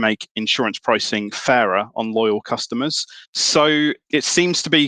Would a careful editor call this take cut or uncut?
cut